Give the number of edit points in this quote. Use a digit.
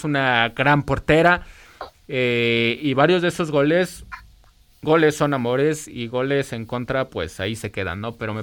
1